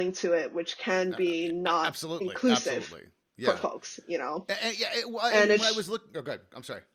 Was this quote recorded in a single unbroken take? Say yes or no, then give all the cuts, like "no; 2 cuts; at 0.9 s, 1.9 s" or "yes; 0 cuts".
yes; 0 cuts